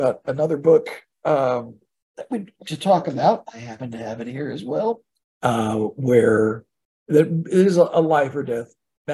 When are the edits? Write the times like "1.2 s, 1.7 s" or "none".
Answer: 5.2 s